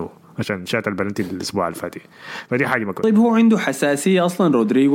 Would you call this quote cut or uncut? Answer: uncut